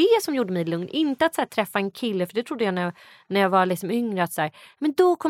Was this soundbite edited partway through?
no; 0 cuts

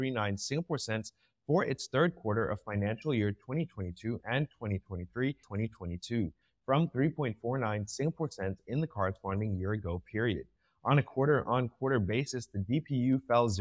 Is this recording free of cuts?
no; 1 cut; at 5.4 s

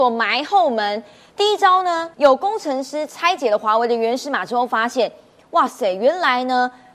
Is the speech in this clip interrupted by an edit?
yes; 1 cut; at 2.1 s

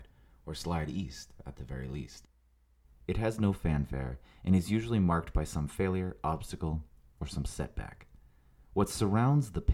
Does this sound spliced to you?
yes; 1 cut; at 2.8 s

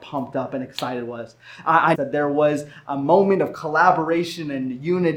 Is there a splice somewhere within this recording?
yes; 1 cut; at 1.9 s

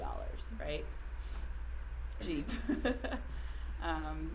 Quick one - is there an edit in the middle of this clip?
yes; 1 cut; at 2.2 s

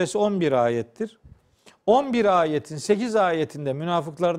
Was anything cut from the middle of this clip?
no; 0 cuts

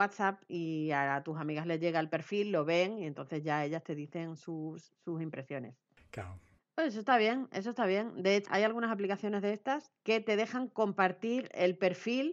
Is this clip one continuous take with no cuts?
no; 2 cuts; at 6.6 s, 8.5 s

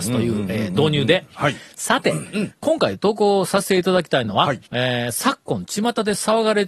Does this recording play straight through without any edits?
no; 1 cut; at 4.7 s

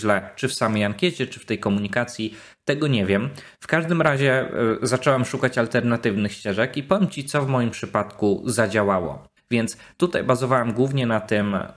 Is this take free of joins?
no; 1 cut; at 9.4 s

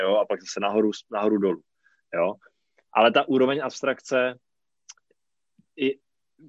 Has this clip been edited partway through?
no; 0 cuts

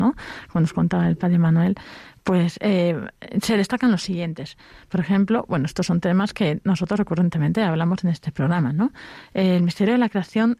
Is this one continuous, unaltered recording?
yes; 0 cuts

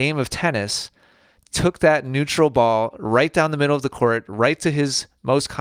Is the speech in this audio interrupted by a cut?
no; 0 cuts

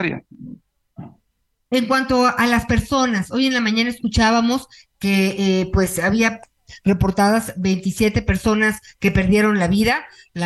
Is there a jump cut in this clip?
no; 0 cuts

